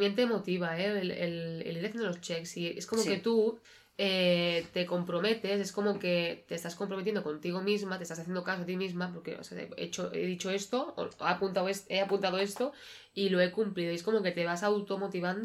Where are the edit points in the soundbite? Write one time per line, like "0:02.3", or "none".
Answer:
none

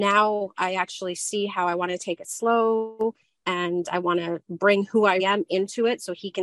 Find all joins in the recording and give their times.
0:05.2

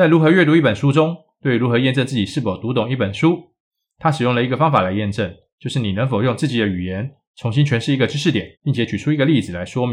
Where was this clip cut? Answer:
0:08.5

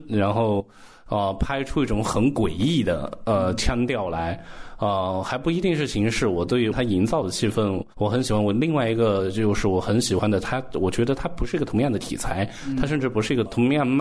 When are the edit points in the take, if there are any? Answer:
0:07.9

